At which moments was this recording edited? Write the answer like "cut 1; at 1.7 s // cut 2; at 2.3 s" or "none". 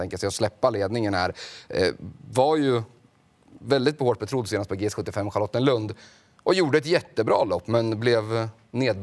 cut 1; at 1.7 s